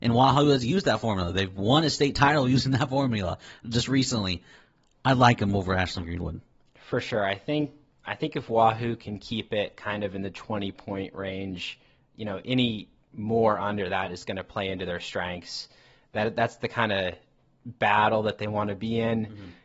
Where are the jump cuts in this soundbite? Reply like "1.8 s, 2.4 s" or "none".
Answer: none

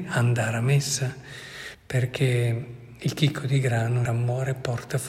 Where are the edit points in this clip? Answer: 1.7 s, 4.1 s

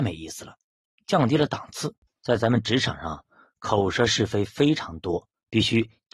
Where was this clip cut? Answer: 2.1 s

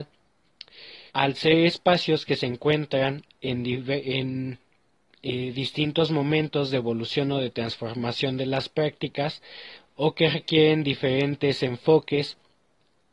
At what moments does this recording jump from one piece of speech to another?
1.1 s

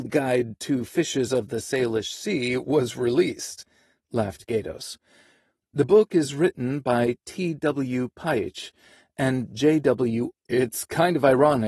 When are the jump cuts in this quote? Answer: 10.3 s

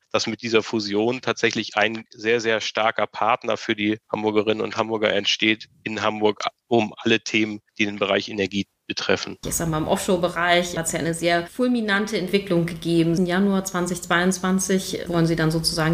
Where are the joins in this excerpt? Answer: 9.4 s, 13.2 s

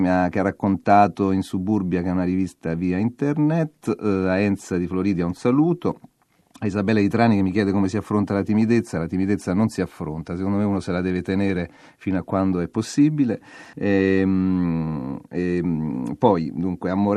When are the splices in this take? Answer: 13.7 s

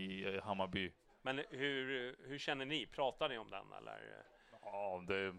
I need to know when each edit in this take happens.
1.1 s

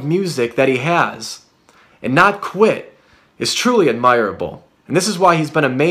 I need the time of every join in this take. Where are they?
4.8 s

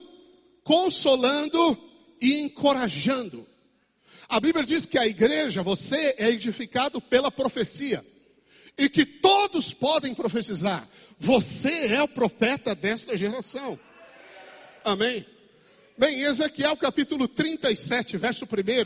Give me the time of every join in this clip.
none

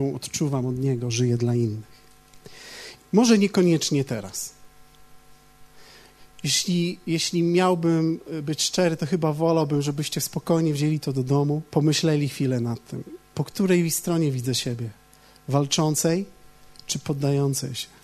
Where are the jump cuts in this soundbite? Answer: 3.0 s, 11.7 s, 13.3 s

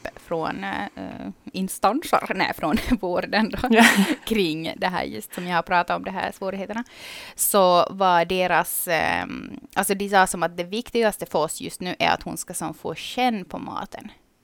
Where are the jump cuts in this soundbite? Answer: 1.5 s

